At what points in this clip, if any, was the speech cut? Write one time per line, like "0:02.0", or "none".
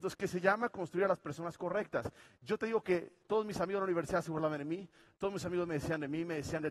none